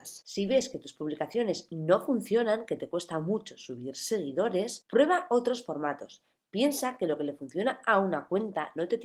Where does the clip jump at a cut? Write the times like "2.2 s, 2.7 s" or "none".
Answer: none